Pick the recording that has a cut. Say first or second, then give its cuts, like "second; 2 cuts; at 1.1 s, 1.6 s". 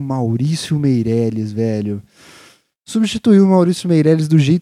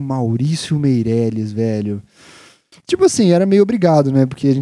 second; 1 cut; at 2.7 s